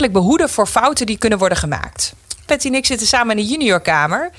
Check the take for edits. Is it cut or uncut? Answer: cut